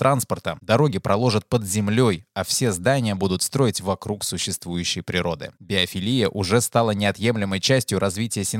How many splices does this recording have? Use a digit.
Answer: 0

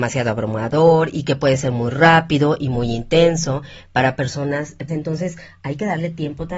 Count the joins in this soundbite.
1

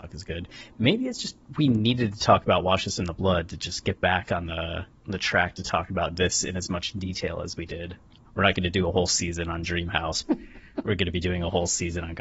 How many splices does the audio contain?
2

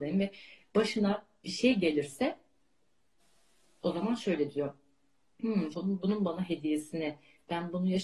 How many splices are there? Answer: 1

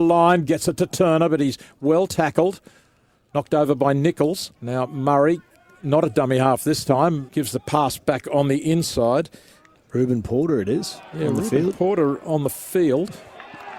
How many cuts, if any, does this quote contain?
3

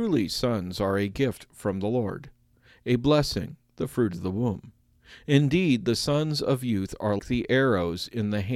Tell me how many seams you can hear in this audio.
1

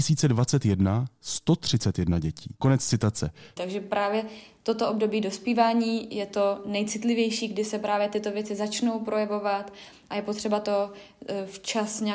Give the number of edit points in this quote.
1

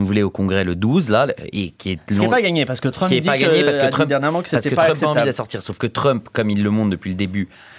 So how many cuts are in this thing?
0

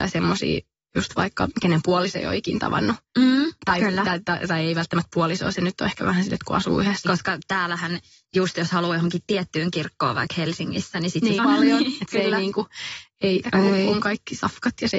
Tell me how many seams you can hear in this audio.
3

